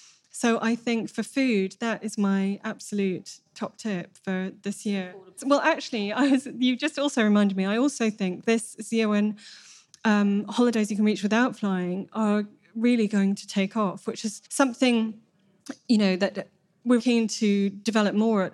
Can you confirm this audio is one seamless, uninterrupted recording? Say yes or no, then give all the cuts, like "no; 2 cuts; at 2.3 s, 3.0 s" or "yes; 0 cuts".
no; 3 cuts; at 5.4 s, 14.5 s, 17.0 s